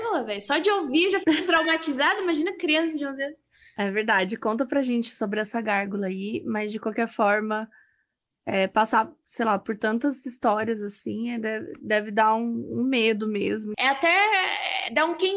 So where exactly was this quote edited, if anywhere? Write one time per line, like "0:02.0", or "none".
0:13.7